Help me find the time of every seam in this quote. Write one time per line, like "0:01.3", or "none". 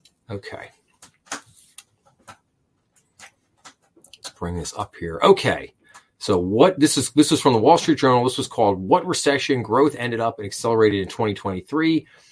none